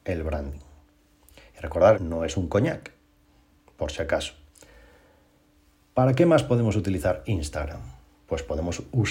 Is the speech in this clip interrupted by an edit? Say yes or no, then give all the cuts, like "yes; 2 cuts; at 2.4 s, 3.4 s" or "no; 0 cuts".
yes; 1 cut; at 1.9 s